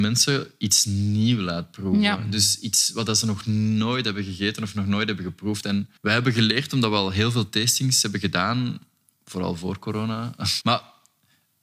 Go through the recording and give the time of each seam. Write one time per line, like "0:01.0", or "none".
0:06.0
0:10.6